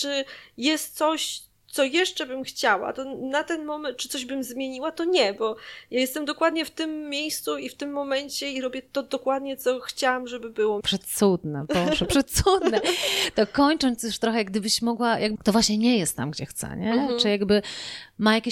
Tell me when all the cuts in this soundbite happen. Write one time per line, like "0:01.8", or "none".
0:10.8
0:15.3